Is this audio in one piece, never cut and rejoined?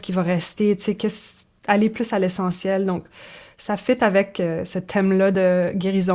yes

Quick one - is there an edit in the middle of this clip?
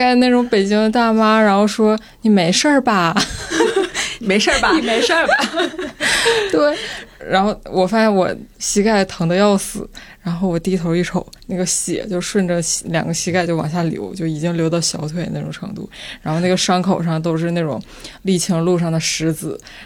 yes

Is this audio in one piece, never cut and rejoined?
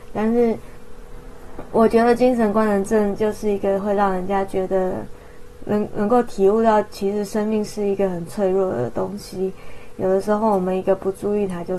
yes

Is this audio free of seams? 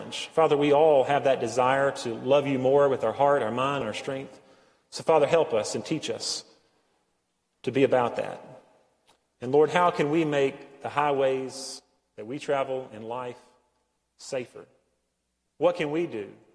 no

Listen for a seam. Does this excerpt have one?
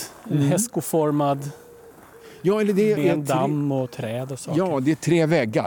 yes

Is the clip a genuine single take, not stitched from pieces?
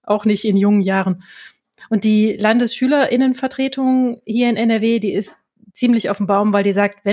yes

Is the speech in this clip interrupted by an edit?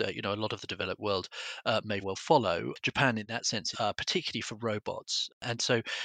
yes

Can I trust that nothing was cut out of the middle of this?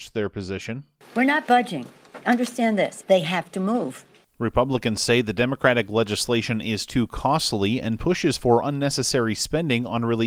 no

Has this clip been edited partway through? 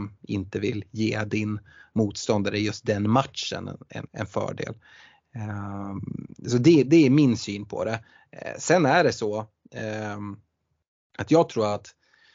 yes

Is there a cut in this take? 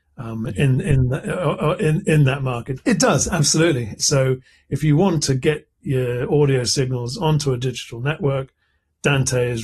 yes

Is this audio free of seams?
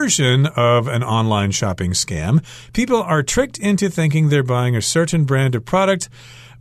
yes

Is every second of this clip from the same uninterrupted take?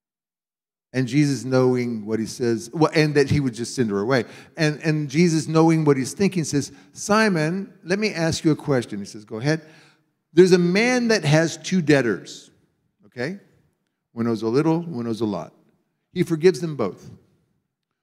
yes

